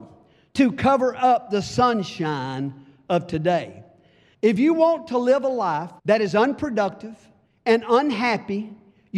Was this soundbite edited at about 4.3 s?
yes; 2 cuts; at 4.3 s, 6.0 s

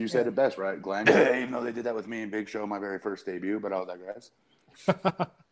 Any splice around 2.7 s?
no; 1 cut; at 1.0 s

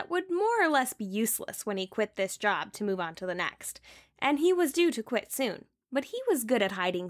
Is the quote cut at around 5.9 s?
yes; 1 cut; at 5.9 s

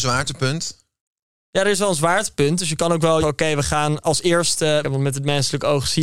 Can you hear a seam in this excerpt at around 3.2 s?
yes; 2 cuts; at 3.2 s, 4.8 s

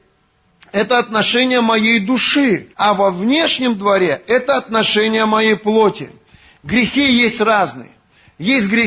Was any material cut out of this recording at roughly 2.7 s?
yes; 1 cut; at 2.7 s

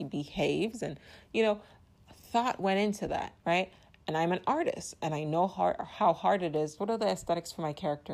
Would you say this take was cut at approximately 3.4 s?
yes; 2 cuts; at 3.4 s, 6.8 s

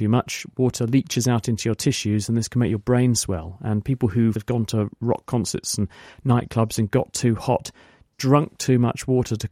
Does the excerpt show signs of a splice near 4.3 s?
yes; 1 cut; at 4.3 s

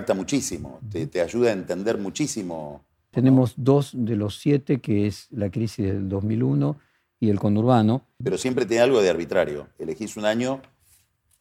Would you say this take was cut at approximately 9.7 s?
no; 2 cuts; at 3.1 s, 8.2 s

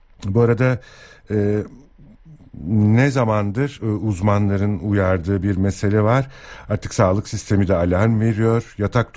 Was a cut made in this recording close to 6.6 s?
no; 0 cuts

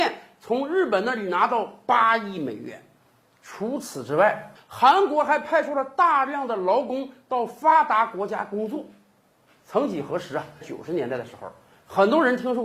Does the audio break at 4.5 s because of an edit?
yes; 2 cuts; at 4.5 s, 10.6 s

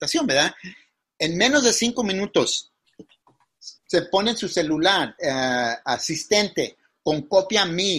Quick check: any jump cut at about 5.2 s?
yes; 2 cuts; at 3.8 s, 5.2 s

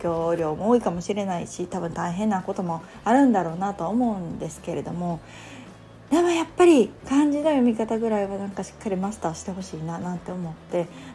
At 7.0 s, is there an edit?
yes; 1 cut; at 7.0 s

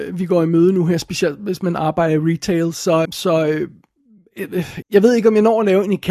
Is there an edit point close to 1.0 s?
no; 2 cuts; at 3.0 s, 4.8 s

